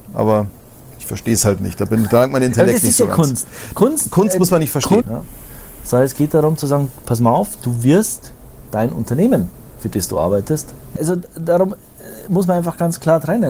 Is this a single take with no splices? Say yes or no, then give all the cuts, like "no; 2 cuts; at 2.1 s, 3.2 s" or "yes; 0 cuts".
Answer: no; 2 cuts; at 5.0 s, 11.0 s